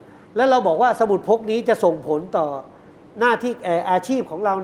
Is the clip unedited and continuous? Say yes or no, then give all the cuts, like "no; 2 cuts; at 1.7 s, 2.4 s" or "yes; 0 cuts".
yes; 0 cuts